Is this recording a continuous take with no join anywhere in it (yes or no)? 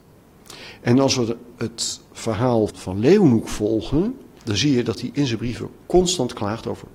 no